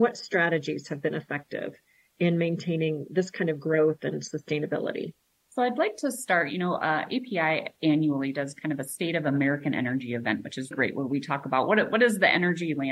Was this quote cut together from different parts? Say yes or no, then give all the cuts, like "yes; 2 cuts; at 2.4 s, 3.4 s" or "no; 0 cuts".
yes; 1 cut; at 10.7 s